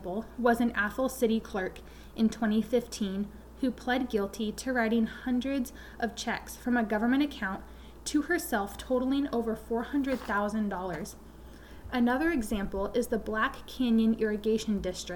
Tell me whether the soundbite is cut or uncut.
uncut